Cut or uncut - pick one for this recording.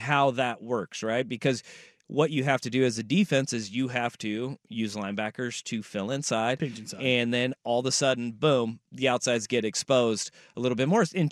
uncut